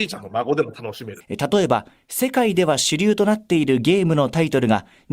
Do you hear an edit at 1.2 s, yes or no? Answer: yes